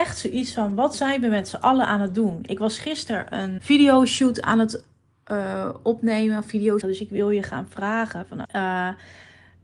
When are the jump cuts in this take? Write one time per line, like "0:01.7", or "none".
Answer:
0:03.6
0:06.8
0:08.4